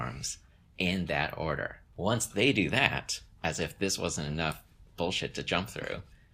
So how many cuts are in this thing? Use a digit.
0